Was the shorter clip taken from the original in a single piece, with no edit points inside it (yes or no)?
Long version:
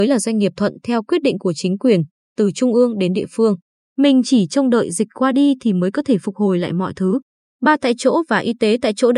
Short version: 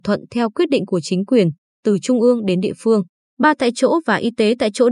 no